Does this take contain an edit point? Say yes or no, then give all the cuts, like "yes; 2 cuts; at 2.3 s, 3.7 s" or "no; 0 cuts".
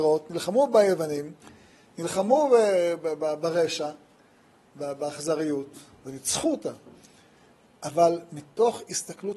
no; 0 cuts